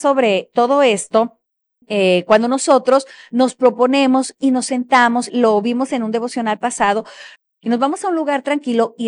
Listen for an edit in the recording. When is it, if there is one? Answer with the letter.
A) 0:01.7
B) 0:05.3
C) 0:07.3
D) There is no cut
B